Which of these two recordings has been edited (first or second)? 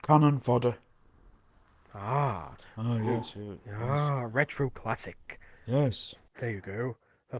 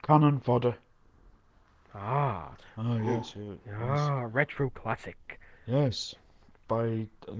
first